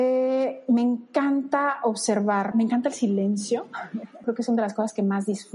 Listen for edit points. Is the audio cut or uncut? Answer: cut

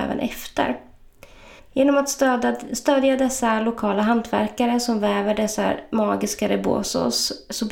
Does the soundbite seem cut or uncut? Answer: cut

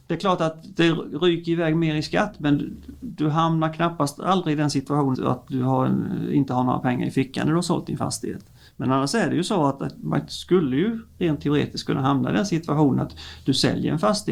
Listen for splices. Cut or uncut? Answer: cut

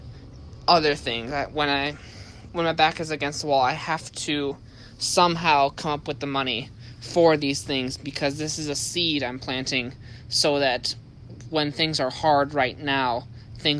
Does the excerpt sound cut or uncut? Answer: uncut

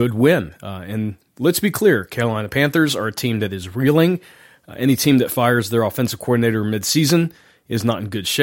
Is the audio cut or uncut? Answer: uncut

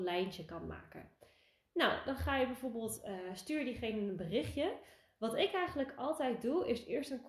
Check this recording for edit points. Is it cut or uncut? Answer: uncut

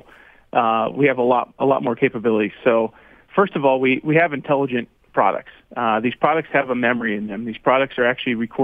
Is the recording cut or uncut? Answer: cut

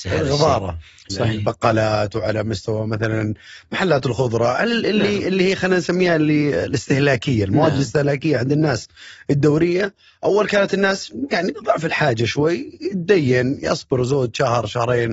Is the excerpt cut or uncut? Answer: cut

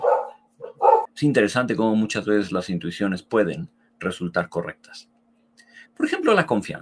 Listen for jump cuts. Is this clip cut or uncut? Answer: cut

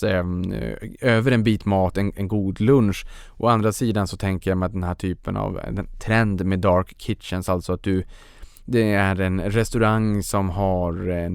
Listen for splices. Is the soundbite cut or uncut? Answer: uncut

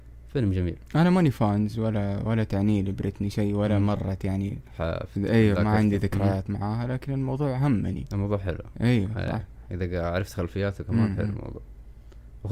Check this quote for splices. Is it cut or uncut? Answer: uncut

